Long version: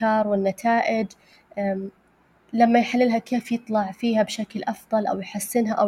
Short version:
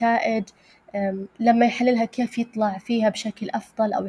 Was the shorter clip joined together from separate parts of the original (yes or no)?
yes